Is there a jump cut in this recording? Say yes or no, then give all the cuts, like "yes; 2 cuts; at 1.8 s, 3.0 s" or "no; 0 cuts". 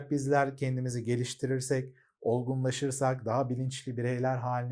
no; 0 cuts